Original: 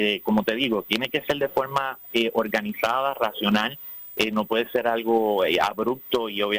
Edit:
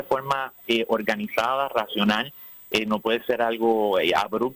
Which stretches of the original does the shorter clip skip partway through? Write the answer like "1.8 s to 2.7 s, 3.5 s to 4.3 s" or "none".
none